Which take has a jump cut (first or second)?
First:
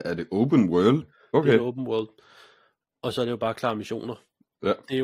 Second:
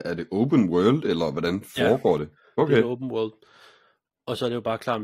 first